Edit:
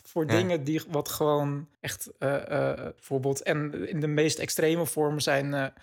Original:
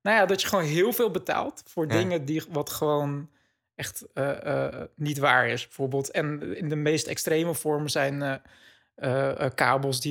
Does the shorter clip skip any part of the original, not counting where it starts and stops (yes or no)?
yes